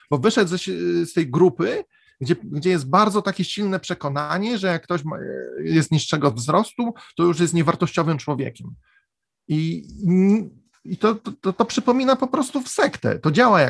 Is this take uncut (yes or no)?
yes